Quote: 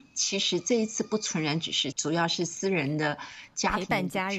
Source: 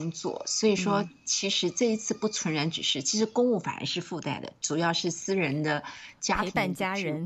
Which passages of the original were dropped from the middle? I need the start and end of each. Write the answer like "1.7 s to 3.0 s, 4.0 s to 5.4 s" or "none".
3.0 s to 4.6 s

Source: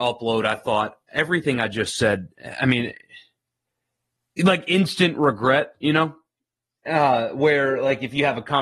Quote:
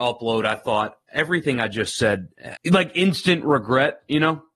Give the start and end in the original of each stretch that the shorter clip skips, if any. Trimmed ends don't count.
2.6 s to 4.3 s

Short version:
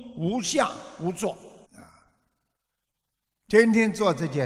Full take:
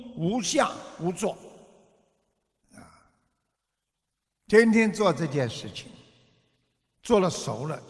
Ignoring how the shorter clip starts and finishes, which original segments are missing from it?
1.6 s to 2.6 s

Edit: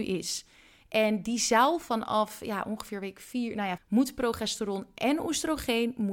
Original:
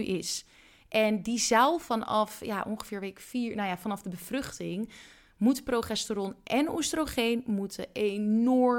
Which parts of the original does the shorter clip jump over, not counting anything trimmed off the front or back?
3.8 s to 5.3 s

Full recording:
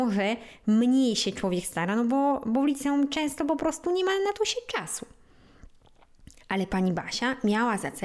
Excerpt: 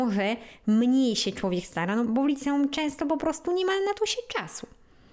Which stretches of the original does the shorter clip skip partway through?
2.1 s to 2.4 s

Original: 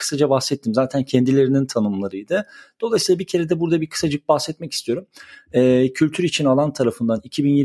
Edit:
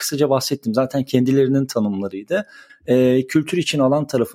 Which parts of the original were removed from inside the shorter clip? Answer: 2.7 s to 5.4 s

